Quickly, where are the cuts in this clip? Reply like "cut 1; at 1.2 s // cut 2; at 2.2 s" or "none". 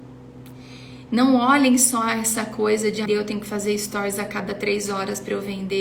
cut 1; at 1.1 s // cut 2; at 3.1 s

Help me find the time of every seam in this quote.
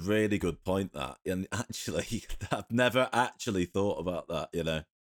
none

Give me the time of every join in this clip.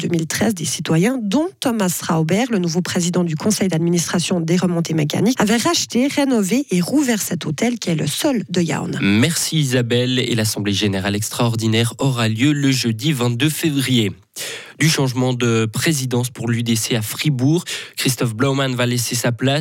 cut 1; at 5.4 s

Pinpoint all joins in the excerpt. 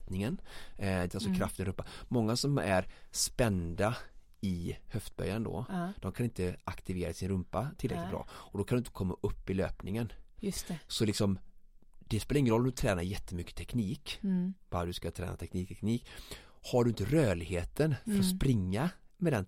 cut 1; at 1.1 s

